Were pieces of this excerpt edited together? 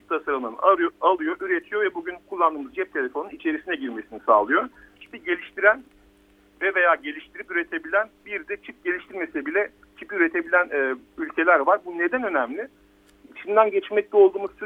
yes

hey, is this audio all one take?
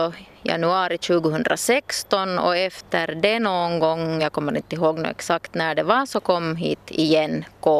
yes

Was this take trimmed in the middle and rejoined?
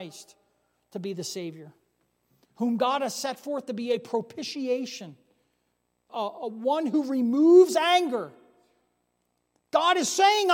yes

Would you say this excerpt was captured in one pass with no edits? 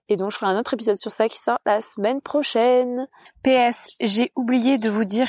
no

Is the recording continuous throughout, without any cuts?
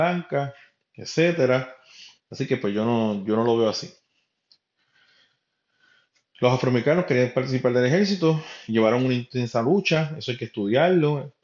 no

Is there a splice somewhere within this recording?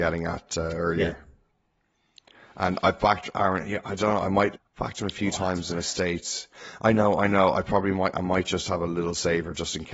yes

